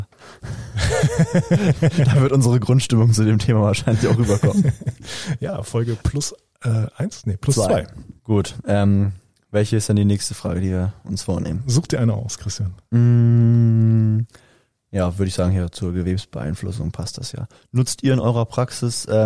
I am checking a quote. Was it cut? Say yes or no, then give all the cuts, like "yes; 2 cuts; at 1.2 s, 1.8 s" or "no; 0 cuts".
yes; 1 cut; at 8.2 s